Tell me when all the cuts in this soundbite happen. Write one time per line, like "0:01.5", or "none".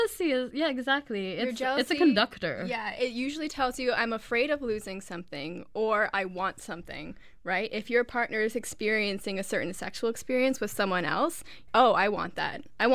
0:11.7

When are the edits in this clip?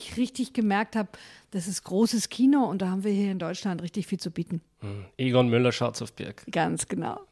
none

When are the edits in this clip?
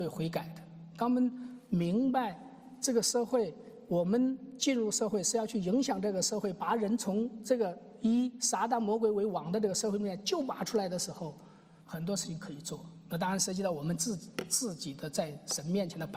0:11.8

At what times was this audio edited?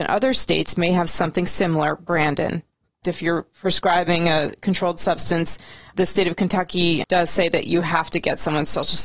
0:03.0
0:07.0

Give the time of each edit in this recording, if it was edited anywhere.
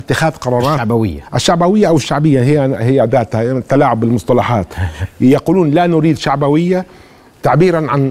none

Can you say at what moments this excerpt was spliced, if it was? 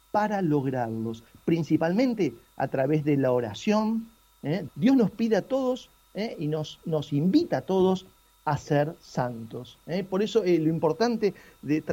0:04.7

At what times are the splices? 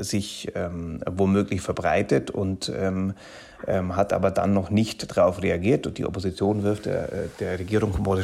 none

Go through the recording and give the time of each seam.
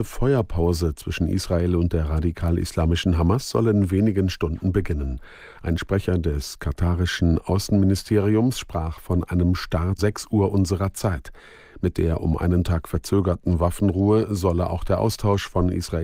0:10.0

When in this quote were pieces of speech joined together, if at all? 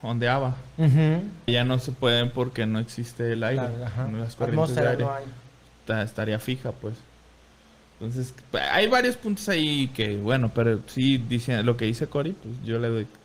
0:01.5

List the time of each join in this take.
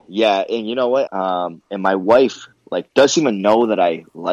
0:01.1

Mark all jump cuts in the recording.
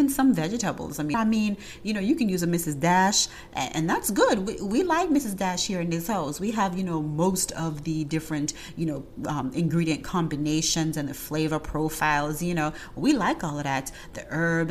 0:01.1

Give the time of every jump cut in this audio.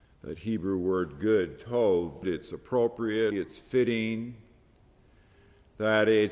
0:02.2
0:03.3

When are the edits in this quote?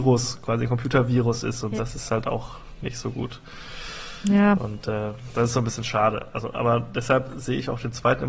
0:01.8

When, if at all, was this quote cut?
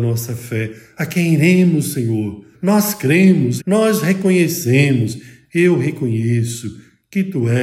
0:02.5
0:03.6

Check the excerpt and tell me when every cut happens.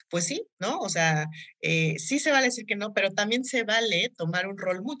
none

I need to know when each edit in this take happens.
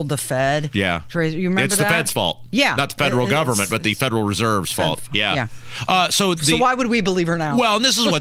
0:06.4

